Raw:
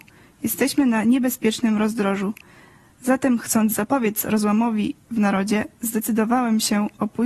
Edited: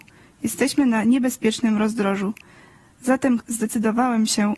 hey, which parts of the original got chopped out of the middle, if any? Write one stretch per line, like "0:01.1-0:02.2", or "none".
0:03.4-0:05.7